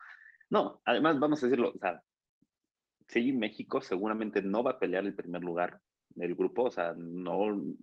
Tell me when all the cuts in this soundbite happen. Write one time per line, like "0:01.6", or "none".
none